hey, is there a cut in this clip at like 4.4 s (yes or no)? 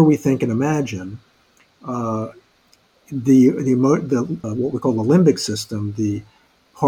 yes